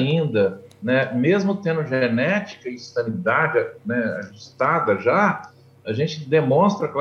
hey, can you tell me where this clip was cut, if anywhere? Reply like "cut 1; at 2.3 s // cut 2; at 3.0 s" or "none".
none